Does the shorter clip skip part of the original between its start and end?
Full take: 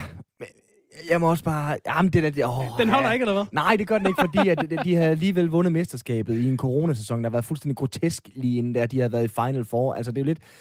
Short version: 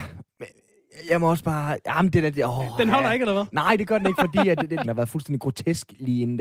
yes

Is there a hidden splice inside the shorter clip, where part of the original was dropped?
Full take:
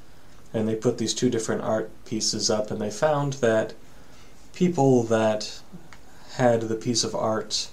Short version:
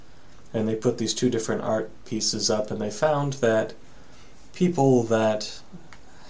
no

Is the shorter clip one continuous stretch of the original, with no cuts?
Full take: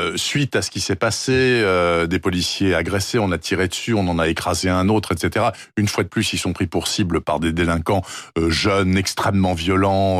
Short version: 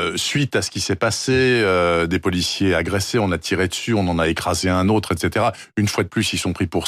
yes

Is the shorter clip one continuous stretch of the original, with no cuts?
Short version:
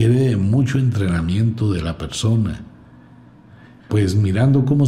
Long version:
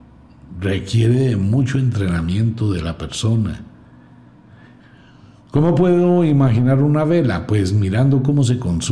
no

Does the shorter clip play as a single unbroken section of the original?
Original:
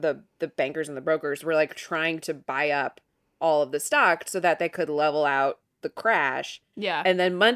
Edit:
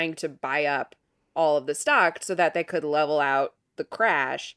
yes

